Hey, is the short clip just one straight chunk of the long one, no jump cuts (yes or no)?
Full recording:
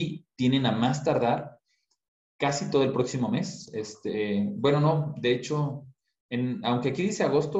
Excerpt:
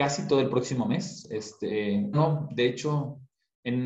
no